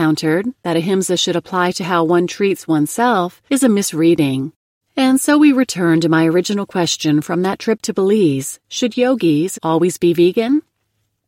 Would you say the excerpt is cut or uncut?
cut